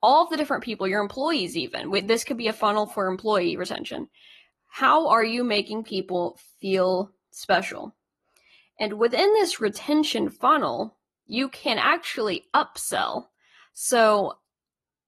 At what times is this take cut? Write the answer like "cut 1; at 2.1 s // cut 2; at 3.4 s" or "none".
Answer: none